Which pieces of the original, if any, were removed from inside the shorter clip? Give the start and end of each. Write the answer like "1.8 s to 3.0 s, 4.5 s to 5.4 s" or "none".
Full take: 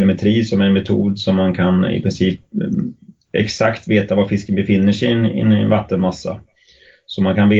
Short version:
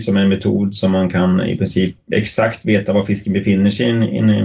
2.6 s to 3.3 s

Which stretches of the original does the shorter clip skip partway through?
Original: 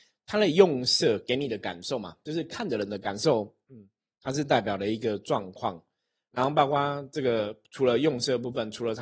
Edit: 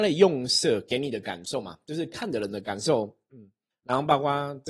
4.1 s to 6.2 s

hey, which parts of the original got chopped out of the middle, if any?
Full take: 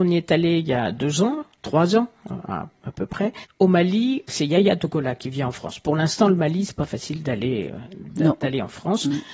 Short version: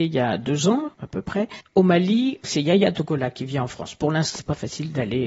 1.5 s to 2.8 s, 6.2 s to 6.7 s

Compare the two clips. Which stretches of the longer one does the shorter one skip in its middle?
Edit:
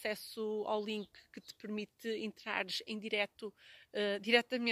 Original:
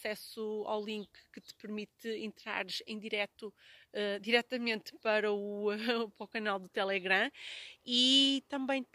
none

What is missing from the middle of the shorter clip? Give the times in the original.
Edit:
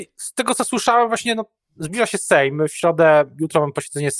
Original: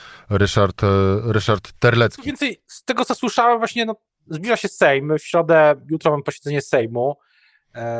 none

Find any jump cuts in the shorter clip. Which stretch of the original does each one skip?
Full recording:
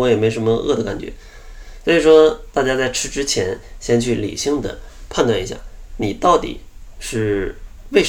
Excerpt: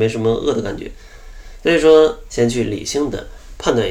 2.5 s to 3.8 s

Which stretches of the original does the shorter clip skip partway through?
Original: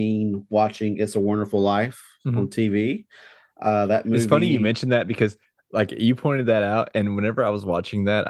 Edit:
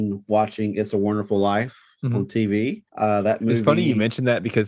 3.1 s to 3.5 s

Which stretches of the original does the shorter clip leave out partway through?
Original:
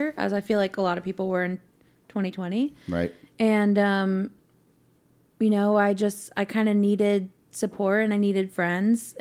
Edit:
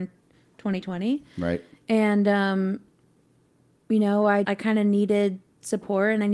5.9 s to 6.3 s

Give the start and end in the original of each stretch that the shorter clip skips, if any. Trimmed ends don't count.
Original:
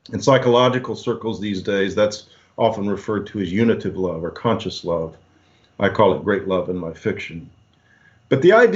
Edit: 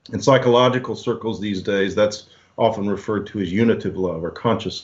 none

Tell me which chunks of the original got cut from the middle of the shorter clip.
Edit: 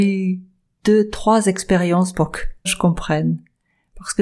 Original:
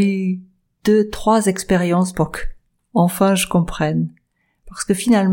2.7 s to 3.4 s

